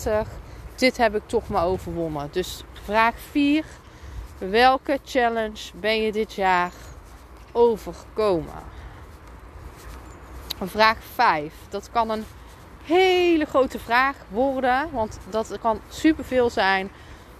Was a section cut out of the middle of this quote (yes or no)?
no